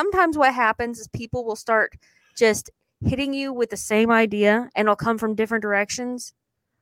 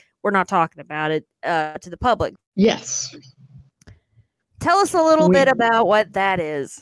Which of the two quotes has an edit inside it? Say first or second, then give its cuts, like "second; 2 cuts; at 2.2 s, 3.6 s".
second; 1 cut; at 2.3 s